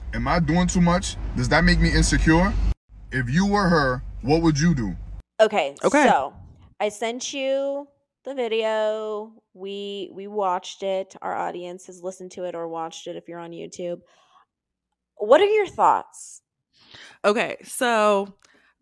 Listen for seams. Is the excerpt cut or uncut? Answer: uncut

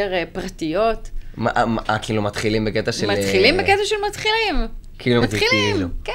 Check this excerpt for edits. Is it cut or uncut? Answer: cut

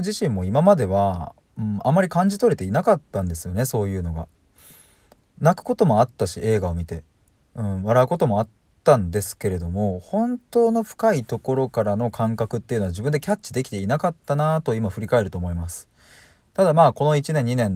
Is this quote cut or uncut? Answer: uncut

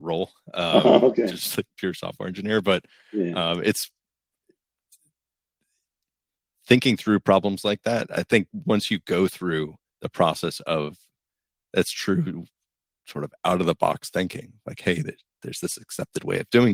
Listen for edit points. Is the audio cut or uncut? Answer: uncut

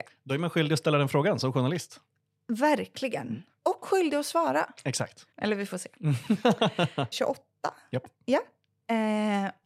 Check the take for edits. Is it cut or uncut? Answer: cut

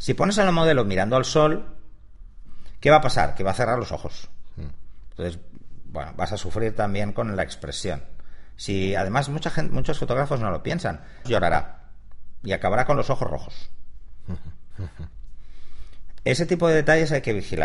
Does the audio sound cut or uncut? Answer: cut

